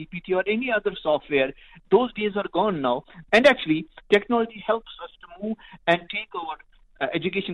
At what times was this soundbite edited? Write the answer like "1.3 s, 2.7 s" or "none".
3.3 s